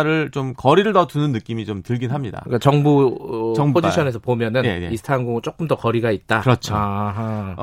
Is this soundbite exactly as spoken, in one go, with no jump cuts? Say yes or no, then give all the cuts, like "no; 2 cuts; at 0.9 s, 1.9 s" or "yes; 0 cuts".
yes; 0 cuts